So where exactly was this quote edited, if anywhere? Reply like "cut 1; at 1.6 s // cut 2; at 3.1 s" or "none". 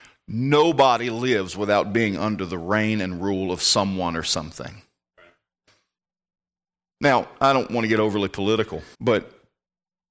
cut 1; at 8.9 s